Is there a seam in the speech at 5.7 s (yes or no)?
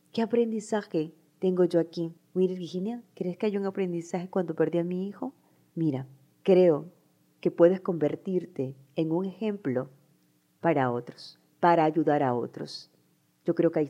yes